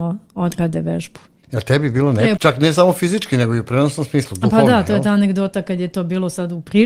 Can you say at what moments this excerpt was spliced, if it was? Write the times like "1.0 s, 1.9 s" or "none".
2.4 s